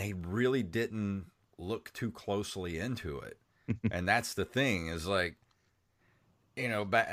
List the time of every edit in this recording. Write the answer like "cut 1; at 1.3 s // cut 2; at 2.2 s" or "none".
none